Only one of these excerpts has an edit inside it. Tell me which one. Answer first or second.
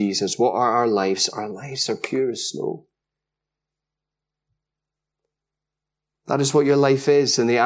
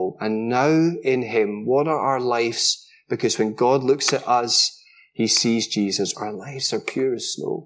second